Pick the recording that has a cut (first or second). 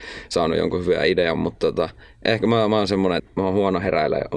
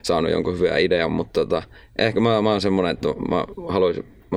first